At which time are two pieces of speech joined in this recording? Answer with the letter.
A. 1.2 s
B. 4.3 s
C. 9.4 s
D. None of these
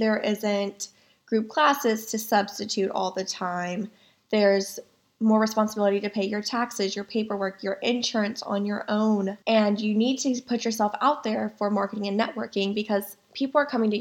C